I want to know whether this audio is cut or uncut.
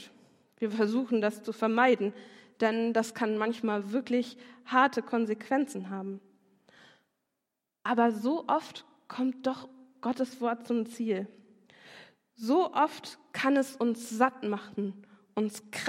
uncut